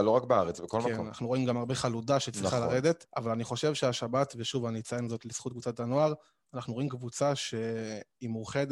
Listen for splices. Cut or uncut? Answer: cut